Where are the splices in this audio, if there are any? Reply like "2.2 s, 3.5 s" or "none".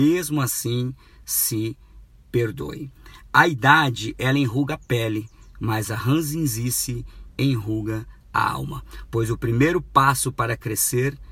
none

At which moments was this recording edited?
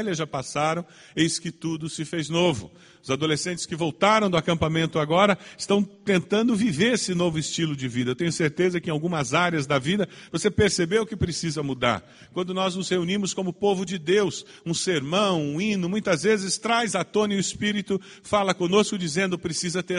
none

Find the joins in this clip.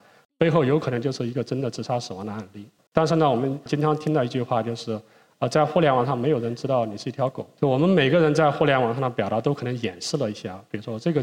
2.9 s

